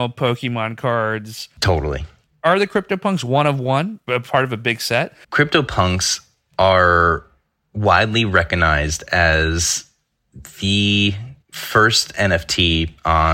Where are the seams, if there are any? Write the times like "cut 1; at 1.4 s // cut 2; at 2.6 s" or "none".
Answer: cut 1; at 5.2 s // cut 2; at 11.4 s